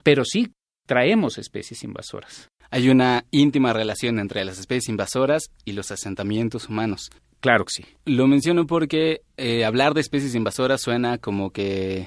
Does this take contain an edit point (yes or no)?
no